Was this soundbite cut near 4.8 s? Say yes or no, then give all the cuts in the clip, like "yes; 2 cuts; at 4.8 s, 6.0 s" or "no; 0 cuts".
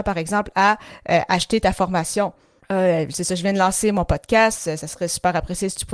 no; 1 cut; at 2.6 s